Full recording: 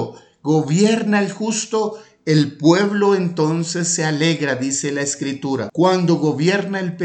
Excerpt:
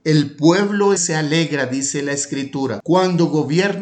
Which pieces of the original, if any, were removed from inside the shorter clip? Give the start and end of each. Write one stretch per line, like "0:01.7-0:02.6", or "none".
0:03.2-0:03.9

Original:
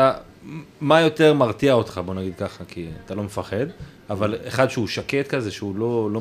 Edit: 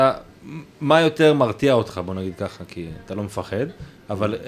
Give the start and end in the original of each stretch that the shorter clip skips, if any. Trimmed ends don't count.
none

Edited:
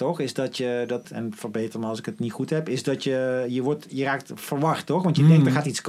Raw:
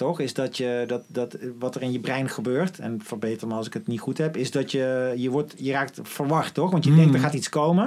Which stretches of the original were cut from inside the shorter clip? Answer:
0:01.0-0:02.7

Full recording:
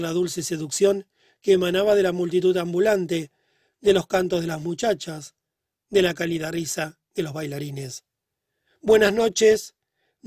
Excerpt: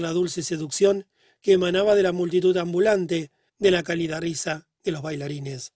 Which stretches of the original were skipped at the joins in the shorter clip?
0:03.5-0:05.8

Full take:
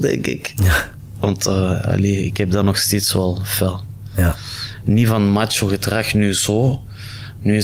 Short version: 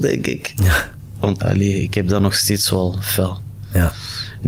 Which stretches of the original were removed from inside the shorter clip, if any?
0:01.4-0:01.8

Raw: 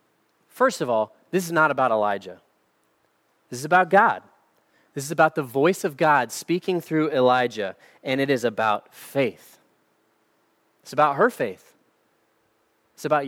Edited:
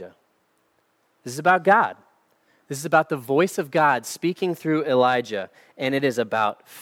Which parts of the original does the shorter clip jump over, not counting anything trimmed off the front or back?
none

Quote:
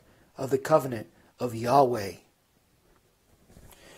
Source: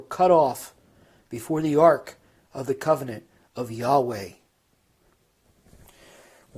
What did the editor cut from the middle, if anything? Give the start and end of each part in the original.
none

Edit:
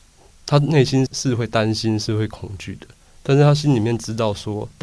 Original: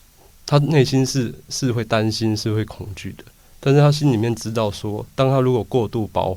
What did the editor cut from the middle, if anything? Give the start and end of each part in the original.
0:01.1-0:01.4

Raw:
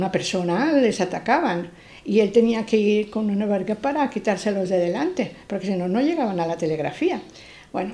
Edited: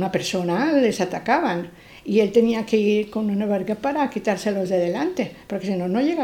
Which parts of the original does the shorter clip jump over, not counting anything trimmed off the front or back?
none

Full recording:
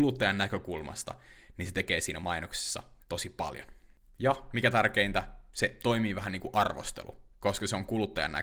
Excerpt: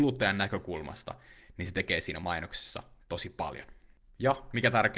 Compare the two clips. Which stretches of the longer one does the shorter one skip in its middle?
none

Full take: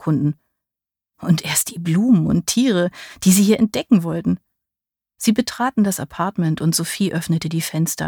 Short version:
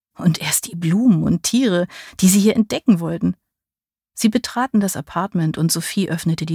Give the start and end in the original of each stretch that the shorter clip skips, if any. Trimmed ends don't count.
none

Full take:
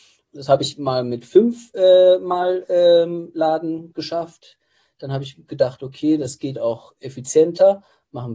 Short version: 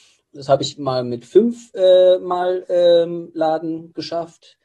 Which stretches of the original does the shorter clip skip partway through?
none

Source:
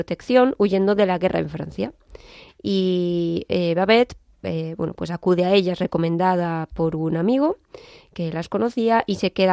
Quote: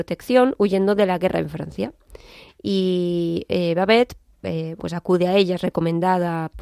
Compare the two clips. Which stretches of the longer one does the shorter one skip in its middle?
0:04.8-0:04.9

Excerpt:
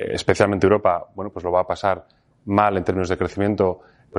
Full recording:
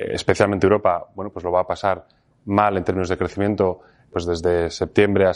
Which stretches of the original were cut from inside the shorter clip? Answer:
none

